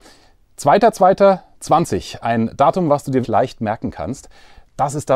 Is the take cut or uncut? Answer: cut